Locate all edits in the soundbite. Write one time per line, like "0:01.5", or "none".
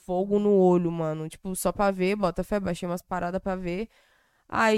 0:01.3